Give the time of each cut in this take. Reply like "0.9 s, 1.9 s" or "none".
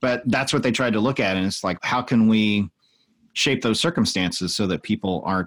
1.8 s